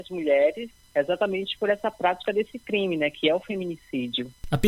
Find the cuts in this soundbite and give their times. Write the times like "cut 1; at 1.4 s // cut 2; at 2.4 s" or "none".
none